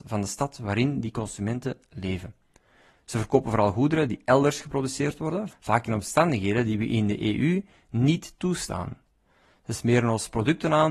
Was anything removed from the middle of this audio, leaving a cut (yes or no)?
yes